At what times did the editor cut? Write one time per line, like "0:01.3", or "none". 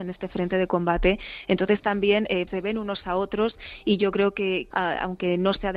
0:02.5
0:04.7